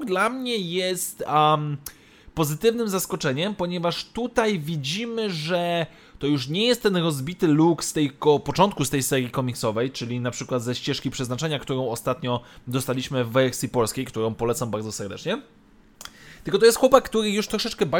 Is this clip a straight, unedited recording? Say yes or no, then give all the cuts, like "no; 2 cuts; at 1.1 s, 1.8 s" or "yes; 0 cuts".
yes; 0 cuts